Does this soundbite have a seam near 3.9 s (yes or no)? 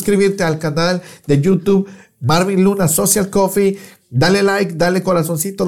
no